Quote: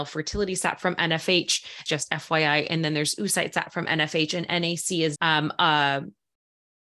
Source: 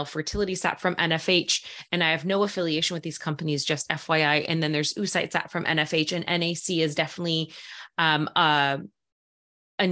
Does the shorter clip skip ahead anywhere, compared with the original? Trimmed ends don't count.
yes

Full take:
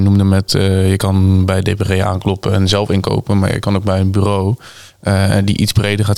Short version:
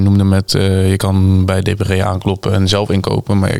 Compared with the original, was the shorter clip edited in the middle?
no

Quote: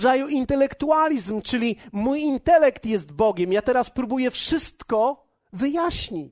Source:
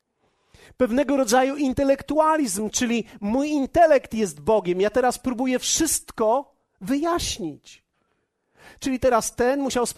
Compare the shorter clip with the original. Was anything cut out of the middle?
no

